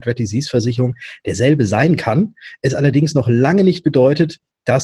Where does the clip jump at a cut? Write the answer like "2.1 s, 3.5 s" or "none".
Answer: none